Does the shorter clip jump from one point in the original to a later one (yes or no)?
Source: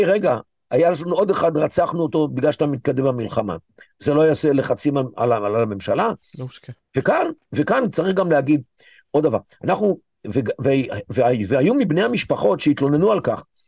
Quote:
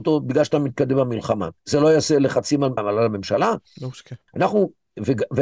yes